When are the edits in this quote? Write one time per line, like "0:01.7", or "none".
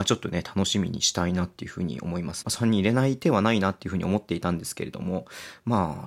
0:02.4